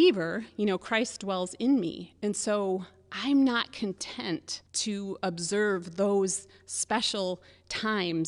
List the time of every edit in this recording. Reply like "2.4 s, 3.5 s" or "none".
4.7 s